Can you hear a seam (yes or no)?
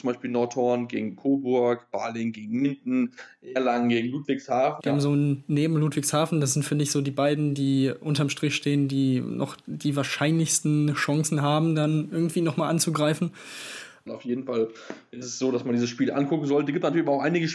yes